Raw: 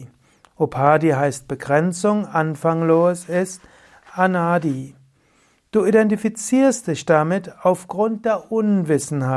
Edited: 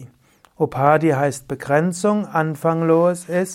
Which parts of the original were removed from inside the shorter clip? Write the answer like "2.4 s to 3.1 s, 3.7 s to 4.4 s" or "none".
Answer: none